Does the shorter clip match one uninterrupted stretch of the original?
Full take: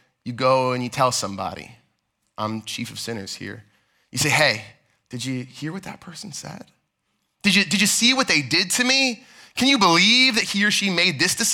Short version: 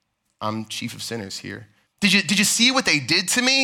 no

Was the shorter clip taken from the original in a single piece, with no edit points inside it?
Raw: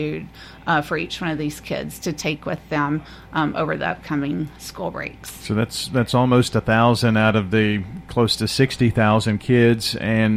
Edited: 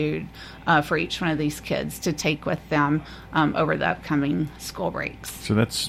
yes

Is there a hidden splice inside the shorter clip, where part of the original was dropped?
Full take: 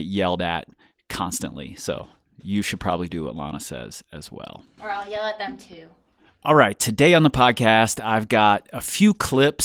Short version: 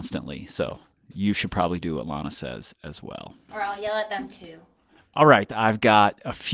yes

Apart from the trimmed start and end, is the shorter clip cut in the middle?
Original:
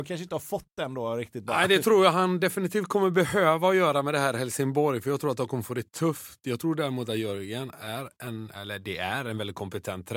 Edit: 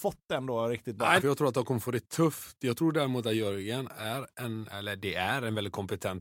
yes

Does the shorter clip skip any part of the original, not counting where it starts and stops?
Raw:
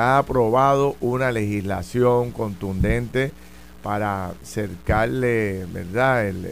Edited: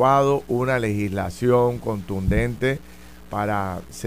no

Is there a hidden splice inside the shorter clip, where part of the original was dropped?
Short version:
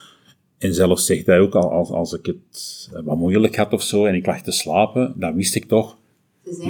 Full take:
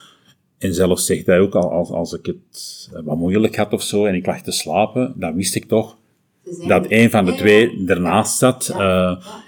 no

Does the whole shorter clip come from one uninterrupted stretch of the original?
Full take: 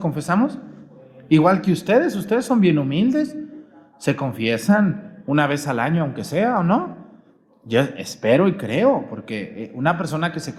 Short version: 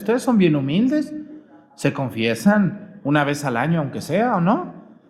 yes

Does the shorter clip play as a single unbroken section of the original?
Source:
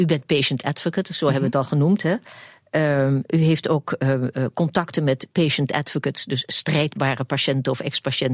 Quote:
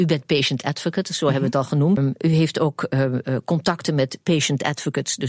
no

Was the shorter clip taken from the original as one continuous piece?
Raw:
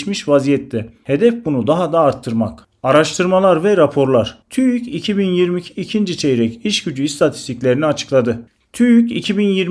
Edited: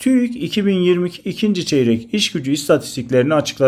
yes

